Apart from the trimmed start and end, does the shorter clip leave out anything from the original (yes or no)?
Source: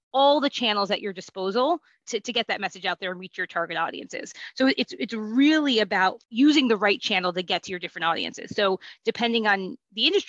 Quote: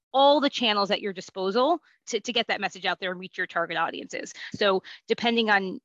yes